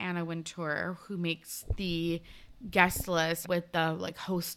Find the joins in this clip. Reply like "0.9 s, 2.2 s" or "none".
3.4 s